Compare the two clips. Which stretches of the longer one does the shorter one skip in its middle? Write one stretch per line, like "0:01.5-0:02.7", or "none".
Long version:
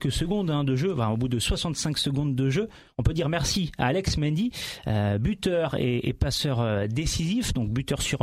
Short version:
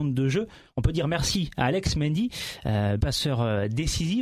0:05.2-0:06.2